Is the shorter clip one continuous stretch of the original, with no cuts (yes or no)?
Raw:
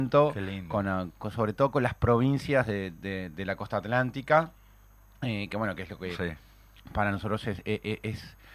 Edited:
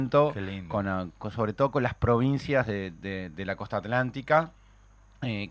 yes